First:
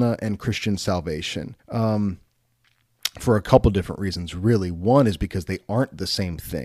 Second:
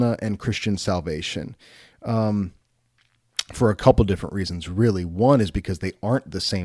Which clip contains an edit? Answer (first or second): first